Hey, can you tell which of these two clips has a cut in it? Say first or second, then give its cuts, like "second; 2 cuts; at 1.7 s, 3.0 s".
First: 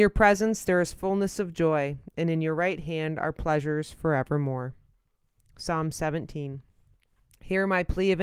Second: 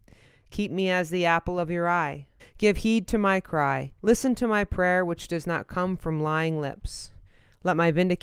second; 2 cuts; at 2.4 s, 4.0 s